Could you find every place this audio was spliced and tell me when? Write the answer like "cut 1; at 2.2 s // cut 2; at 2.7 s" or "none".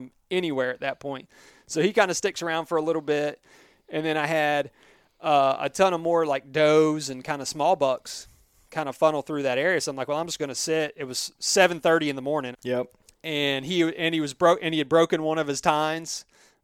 cut 1; at 12.5 s